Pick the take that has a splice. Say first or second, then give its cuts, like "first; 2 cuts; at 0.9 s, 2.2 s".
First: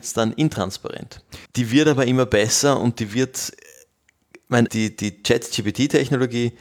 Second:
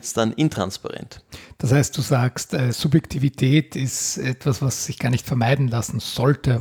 first; 2 cuts; at 1.5 s, 4.7 s